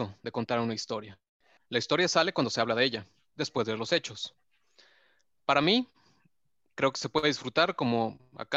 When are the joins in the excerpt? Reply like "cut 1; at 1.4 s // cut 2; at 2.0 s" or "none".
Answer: cut 1; at 1.6 s